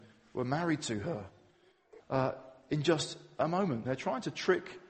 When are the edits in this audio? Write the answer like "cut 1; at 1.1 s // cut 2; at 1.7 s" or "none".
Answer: cut 1; at 2.0 s // cut 2; at 3.8 s